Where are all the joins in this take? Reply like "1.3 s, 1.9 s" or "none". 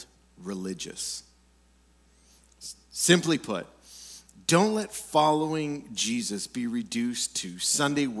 none